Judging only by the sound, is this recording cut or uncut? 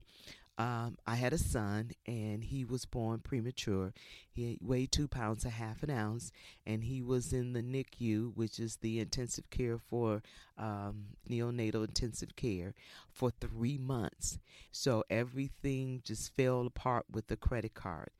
cut